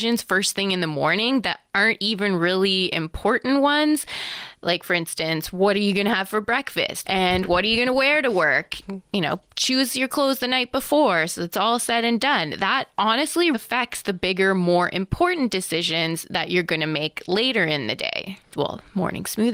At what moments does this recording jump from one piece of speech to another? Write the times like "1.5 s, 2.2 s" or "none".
7.0 s, 13.5 s, 18.5 s